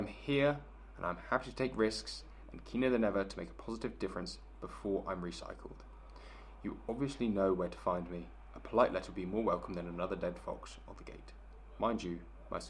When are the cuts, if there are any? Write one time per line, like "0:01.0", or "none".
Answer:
none